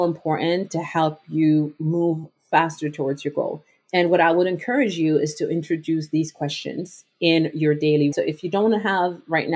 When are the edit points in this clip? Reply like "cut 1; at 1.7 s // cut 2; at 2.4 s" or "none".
cut 1; at 8.1 s